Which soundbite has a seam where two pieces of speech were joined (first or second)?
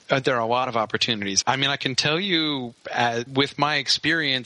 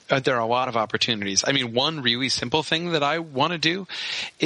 first